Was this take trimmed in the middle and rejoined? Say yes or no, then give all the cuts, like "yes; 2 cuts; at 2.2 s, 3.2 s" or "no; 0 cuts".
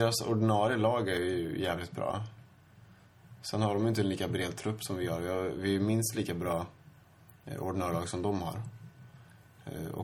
no; 0 cuts